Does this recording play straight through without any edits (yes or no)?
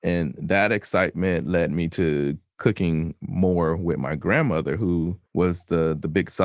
no